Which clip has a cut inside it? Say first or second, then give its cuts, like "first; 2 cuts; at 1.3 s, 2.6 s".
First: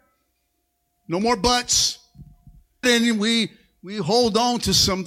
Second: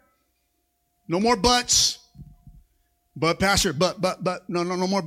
first; 1 cut; at 2.8 s